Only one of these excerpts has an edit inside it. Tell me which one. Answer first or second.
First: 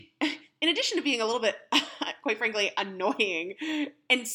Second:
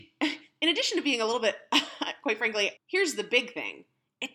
second